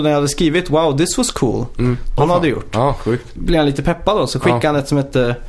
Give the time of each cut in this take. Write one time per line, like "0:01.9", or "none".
0:02.2
0:03.4